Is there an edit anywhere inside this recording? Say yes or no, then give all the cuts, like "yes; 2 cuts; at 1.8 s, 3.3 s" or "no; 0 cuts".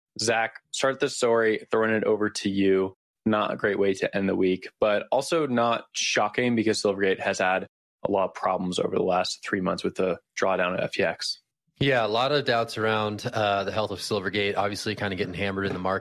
no; 0 cuts